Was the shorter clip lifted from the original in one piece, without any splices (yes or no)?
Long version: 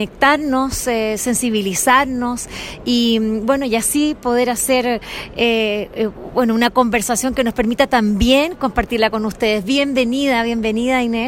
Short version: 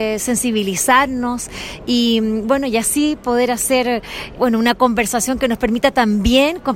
no